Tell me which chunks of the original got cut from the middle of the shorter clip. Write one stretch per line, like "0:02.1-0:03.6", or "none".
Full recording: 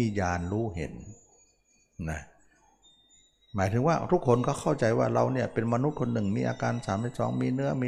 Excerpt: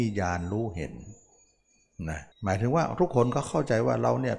0:02.3-0:03.4